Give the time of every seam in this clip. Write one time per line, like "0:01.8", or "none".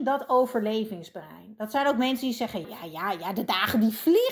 0:02.6